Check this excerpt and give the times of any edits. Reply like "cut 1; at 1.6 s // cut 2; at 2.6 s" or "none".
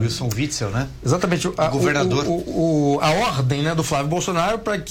none